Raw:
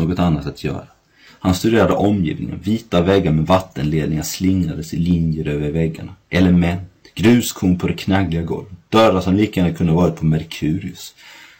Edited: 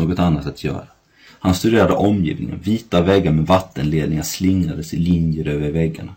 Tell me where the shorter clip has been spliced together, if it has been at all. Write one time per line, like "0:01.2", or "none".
none